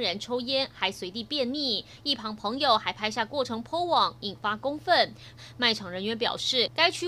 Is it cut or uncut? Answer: cut